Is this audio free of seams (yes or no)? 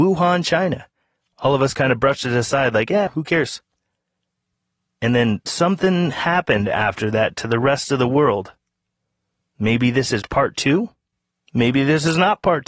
no